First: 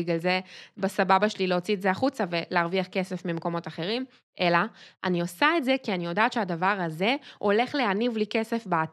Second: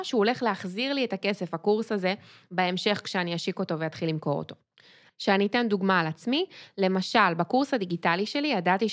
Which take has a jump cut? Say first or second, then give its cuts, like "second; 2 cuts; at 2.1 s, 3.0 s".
second; 1 cut; at 5.1 s